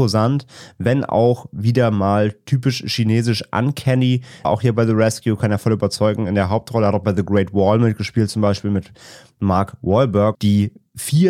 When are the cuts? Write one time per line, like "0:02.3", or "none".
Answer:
0:04.4
0:10.3